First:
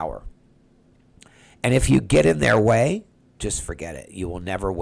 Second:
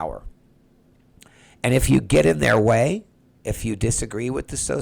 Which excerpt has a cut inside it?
first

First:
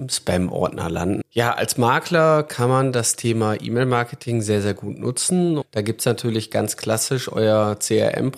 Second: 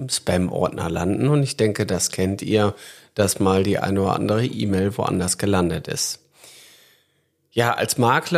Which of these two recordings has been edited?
first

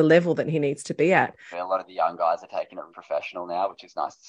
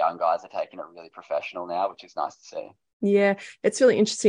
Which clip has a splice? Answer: first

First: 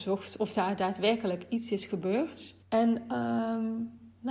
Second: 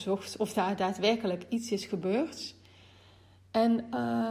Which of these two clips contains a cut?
first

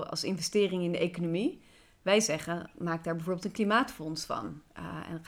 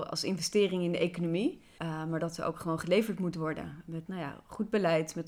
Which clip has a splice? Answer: second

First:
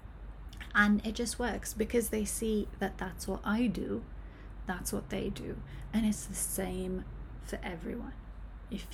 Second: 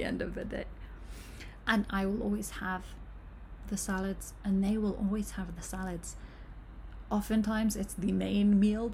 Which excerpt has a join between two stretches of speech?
second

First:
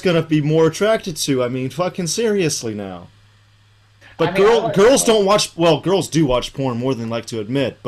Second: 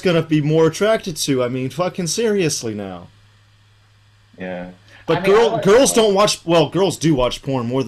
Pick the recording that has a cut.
first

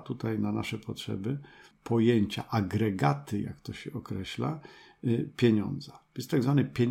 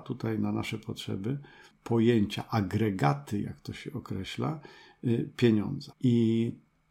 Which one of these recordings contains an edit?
second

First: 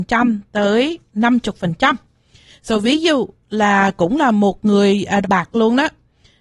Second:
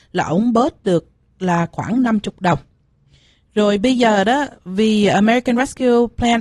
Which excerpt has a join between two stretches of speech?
first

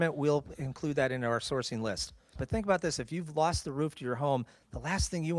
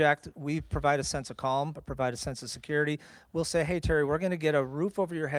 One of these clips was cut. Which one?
first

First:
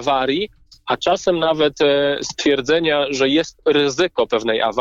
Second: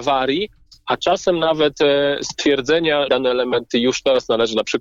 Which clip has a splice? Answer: second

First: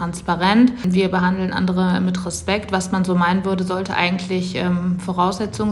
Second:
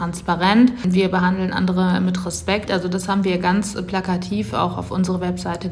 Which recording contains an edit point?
second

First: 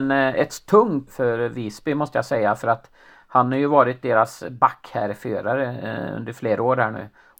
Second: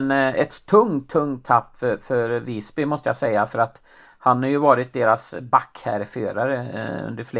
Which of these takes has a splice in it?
first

